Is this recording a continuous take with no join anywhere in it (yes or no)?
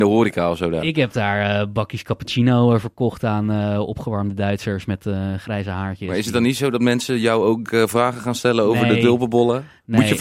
yes